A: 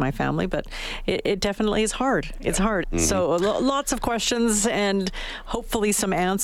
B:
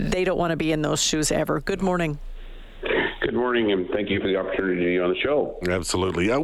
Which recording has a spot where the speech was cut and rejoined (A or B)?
A